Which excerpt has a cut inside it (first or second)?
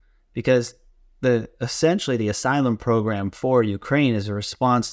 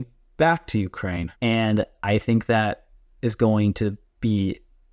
second